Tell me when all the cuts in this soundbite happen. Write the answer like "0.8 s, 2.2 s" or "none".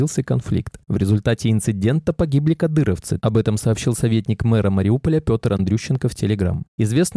3.2 s